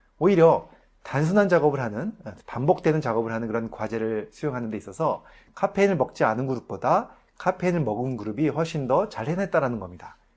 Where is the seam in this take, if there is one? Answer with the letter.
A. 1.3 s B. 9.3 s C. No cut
C